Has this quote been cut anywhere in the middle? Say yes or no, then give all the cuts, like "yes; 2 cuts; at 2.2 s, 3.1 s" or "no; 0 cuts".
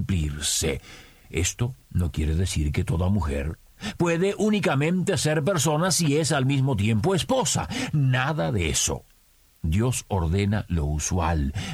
yes; 1 cut; at 4.0 s